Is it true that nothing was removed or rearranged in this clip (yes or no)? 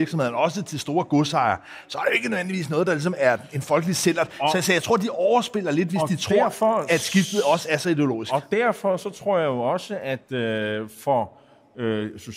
yes